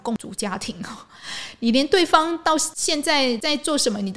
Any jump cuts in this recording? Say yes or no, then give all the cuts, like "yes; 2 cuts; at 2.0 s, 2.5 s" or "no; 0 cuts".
no; 0 cuts